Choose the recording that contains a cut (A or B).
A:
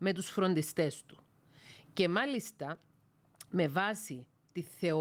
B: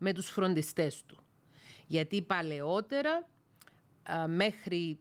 A